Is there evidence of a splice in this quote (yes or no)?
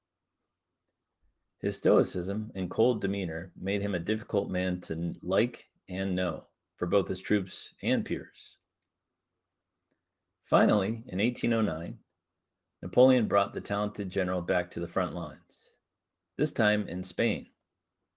no